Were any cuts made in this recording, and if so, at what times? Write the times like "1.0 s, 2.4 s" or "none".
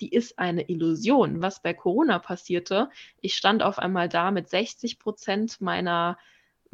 1.4 s